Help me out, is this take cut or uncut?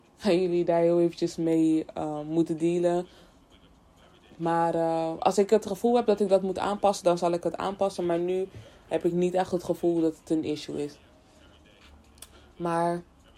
uncut